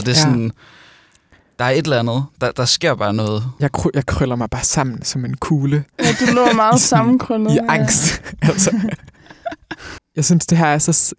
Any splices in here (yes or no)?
yes